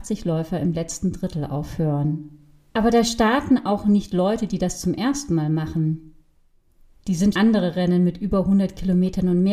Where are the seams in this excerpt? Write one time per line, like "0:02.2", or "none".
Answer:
0:02.7
0:07.3